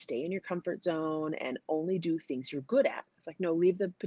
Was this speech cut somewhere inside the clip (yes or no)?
no